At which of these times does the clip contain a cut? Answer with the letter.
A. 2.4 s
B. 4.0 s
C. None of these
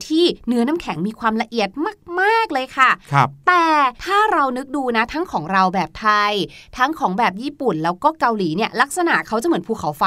B